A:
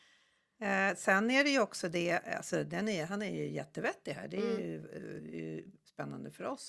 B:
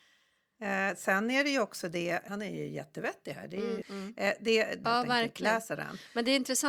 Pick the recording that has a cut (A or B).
B